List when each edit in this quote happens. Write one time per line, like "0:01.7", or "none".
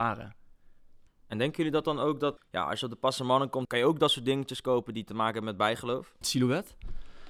0:01.1
0:02.4
0:06.2